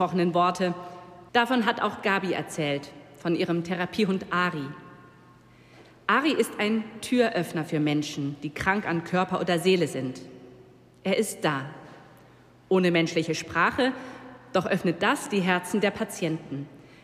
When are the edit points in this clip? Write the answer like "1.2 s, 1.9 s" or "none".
1.3 s